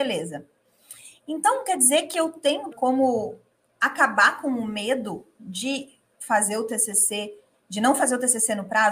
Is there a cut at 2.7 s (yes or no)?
yes